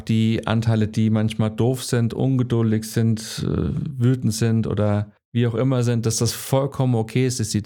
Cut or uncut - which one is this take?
uncut